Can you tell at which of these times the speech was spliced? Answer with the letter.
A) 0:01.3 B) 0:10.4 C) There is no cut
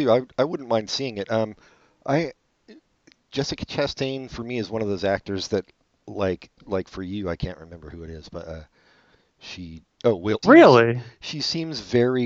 B